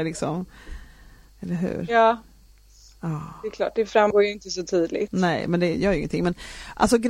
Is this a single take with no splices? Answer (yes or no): yes